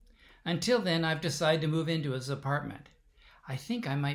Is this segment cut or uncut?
uncut